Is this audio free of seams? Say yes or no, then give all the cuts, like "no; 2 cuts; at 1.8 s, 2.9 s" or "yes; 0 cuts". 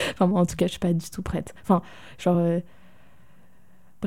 yes; 0 cuts